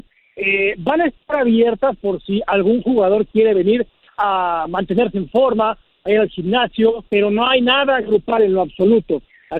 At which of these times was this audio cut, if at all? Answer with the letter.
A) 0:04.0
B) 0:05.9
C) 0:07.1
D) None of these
C